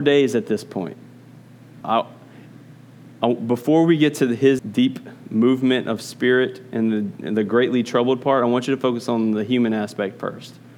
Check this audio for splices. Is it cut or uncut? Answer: cut